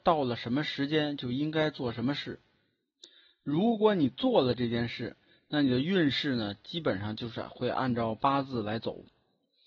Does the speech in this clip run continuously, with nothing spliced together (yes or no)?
yes